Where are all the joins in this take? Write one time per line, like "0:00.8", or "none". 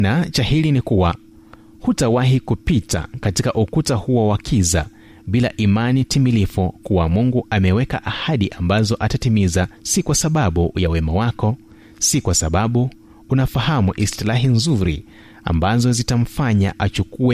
0:09.8